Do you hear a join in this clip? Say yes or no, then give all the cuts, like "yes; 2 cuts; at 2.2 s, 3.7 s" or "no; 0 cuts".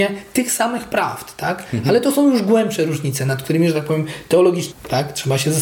yes; 1 cut; at 4.7 s